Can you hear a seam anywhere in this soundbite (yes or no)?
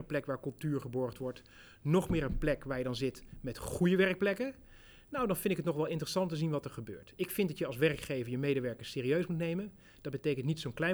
no